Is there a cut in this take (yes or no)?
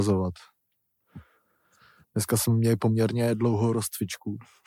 yes